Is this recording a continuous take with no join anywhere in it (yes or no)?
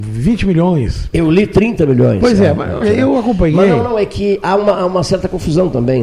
no